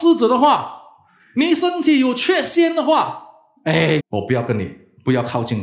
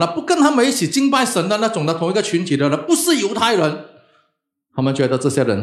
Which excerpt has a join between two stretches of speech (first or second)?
first